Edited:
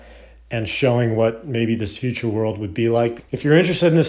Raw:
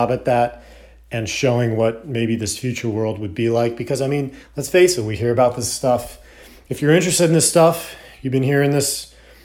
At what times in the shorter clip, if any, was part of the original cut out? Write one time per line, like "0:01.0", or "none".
0:03.2